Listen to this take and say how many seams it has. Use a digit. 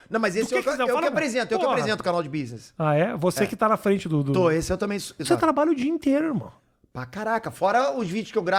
1